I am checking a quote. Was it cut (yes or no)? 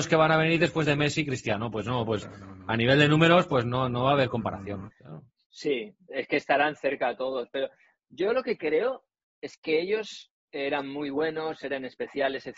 yes